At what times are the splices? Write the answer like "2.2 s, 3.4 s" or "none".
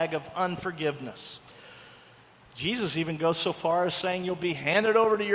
none